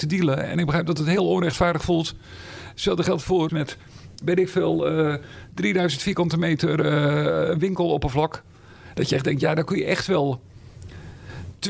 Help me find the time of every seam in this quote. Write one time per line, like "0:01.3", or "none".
0:03.5

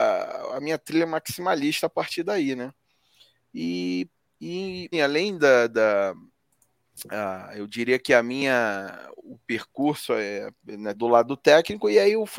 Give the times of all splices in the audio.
0:04.9
0:10.9

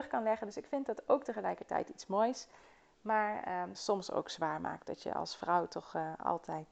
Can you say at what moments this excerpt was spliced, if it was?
0:03.7

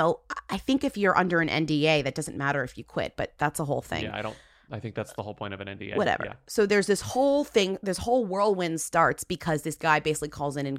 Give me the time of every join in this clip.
none

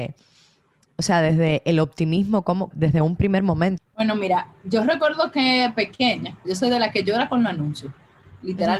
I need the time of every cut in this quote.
0:02.7
0:03.8
0:06.4

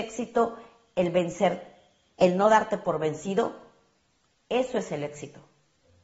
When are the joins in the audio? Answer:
0:02.1

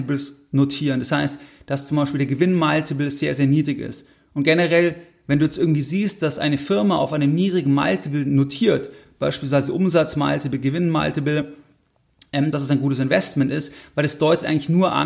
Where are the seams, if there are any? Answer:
0:12.5

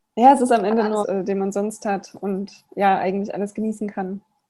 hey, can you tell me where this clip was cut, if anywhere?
0:01.0

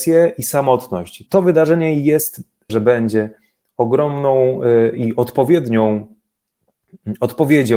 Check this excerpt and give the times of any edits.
0:01.3
0:02.7

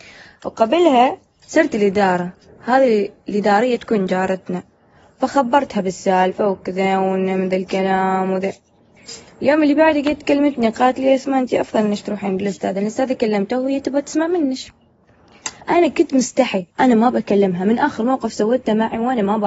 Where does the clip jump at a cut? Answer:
0:15.6
0:16.7

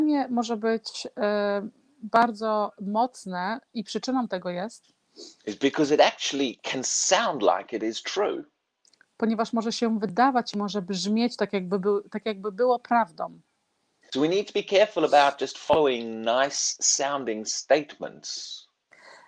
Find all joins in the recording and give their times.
none

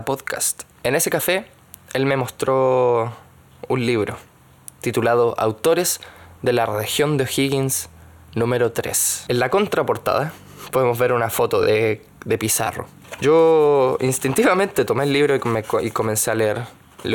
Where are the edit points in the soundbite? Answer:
none

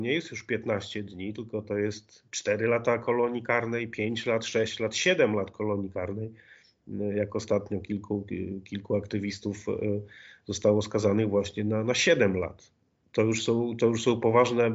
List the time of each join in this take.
none

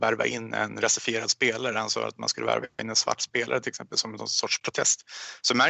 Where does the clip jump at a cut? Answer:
none

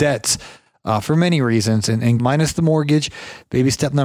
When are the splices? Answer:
0:02.2

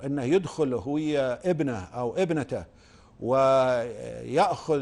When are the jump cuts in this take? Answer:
none

